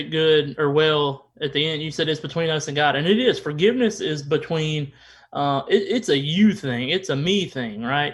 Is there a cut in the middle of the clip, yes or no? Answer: no